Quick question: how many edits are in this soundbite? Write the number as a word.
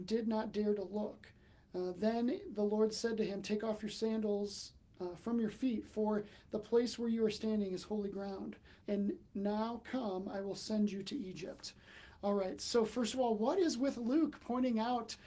one